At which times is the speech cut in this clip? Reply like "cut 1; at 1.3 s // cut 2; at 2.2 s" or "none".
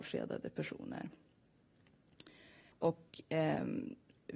cut 1; at 2.7 s